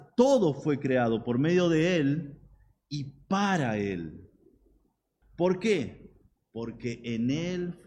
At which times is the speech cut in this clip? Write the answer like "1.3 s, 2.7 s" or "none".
5.2 s